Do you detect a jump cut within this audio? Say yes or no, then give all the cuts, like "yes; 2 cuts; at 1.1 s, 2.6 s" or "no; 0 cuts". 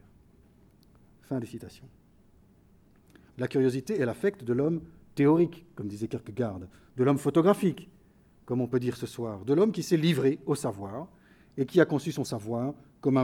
yes; 1 cut; at 3.3 s